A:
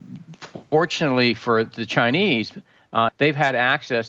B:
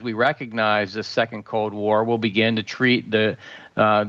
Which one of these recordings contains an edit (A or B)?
A